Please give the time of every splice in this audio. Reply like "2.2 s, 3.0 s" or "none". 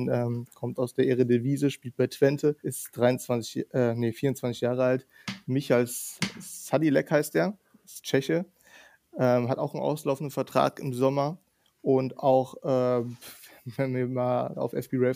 2.6 s